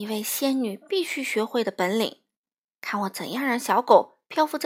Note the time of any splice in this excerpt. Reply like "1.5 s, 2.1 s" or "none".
none